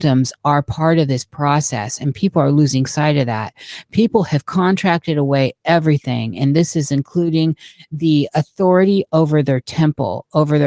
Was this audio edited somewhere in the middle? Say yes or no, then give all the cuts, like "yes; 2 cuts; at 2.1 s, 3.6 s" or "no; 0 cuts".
no; 0 cuts